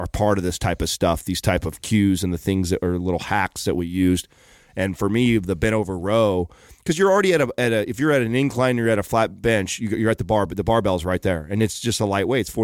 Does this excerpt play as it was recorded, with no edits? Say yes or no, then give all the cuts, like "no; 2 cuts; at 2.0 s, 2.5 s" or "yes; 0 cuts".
yes; 0 cuts